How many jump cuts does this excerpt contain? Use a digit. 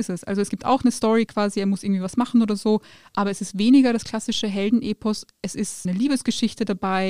0